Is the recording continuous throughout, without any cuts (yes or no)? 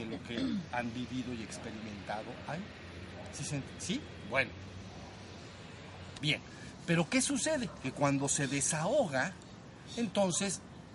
no